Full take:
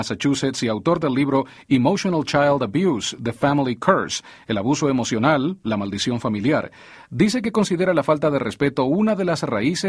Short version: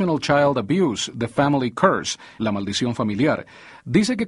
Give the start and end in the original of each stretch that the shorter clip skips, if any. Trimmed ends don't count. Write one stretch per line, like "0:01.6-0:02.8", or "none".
0:04.4-0:05.6